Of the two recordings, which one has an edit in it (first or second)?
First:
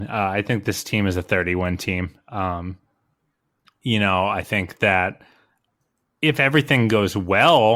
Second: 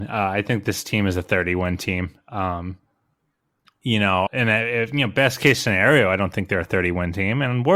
second